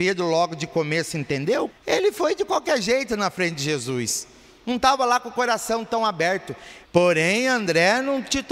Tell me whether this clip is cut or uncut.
cut